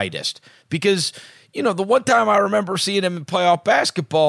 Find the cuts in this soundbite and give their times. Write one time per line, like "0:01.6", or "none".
none

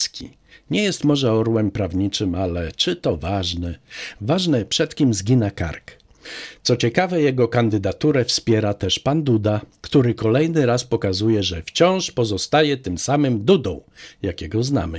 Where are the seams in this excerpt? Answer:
none

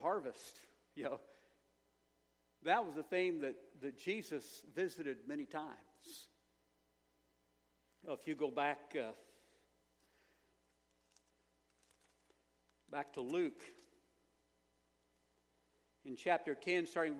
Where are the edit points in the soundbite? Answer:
none

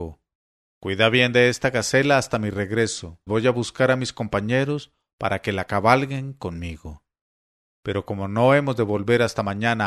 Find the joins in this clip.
0:03.3

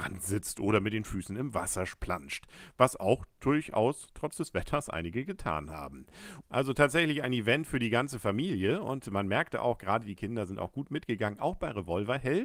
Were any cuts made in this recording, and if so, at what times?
0:06.4

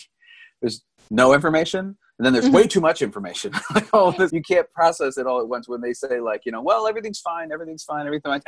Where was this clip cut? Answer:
0:04.3

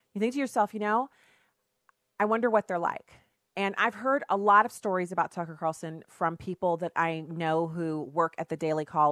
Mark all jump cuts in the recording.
none

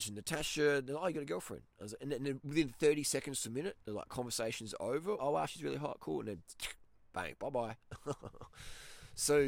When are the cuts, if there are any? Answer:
0:05.2

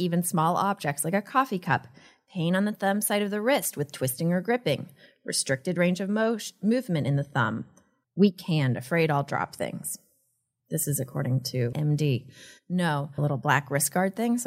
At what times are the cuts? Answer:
0:08.0
0:11.7
0:13.2

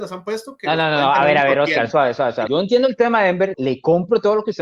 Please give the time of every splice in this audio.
0:02.5
0:03.5

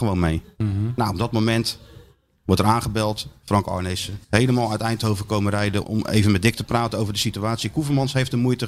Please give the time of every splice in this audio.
0:04.2
0:05.8

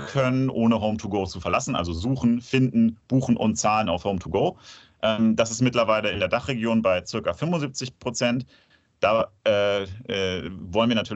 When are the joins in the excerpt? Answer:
none

